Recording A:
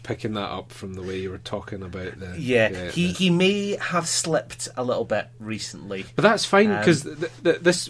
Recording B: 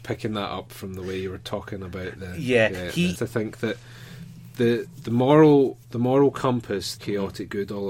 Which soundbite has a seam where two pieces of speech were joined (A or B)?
B